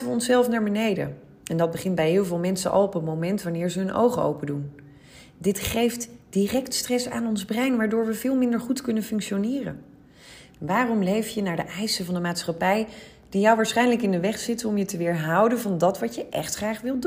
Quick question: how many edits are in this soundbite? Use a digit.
1